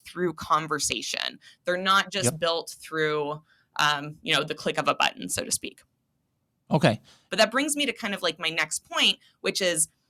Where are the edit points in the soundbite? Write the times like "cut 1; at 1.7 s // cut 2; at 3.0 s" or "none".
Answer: cut 1; at 7.3 s